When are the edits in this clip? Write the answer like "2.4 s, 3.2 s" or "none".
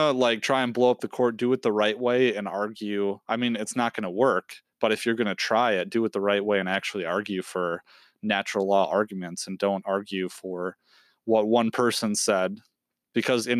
none